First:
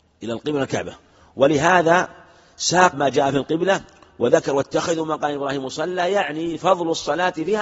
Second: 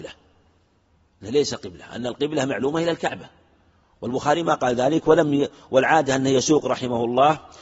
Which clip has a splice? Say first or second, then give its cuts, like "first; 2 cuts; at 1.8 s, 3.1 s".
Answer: first; 1 cut; at 2.9 s